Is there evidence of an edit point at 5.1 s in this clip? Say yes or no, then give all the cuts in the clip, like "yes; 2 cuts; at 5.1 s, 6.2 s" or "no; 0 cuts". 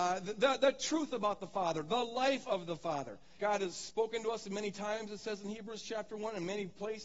no; 1 cut; at 3.4 s